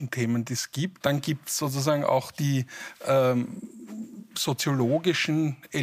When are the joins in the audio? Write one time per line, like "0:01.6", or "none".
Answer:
0:01.0

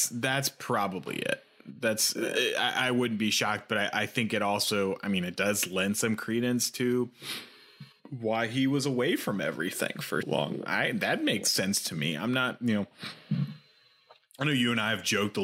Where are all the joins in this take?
0:10.2

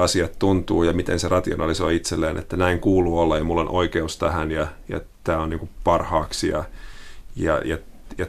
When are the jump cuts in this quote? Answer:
none

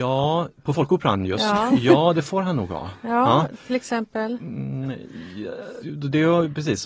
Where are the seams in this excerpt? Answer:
0:05.8

